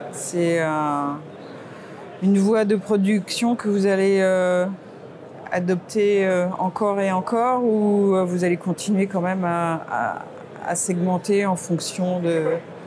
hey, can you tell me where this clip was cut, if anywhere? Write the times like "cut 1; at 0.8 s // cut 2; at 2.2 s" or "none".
none